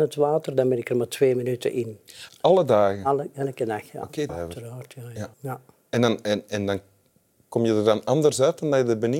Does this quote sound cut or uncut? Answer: cut